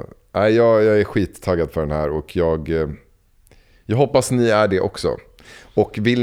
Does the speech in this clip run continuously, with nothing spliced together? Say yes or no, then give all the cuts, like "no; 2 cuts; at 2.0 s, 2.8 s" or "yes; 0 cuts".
yes; 0 cuts